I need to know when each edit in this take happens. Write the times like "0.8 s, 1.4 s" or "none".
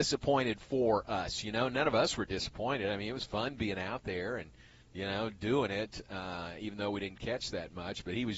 none